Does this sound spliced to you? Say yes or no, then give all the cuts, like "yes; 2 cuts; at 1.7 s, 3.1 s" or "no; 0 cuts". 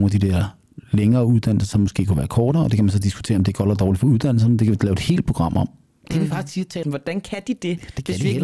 yes; 1 cut; at 6.8 s